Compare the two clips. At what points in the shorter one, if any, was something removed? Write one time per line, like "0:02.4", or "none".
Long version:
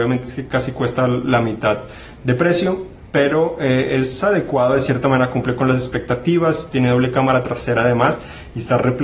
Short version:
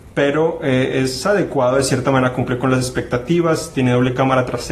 none